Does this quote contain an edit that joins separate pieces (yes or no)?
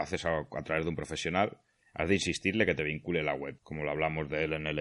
yes